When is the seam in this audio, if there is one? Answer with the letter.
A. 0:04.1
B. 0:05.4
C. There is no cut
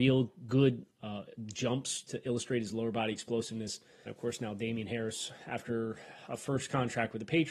A